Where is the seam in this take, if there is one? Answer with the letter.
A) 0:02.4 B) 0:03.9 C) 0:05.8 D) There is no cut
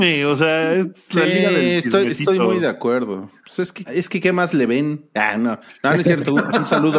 B